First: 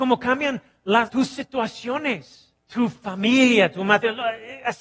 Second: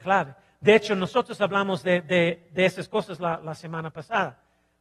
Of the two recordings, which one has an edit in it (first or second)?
first